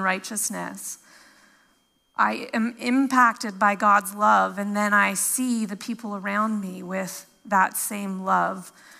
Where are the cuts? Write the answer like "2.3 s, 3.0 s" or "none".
2.1 s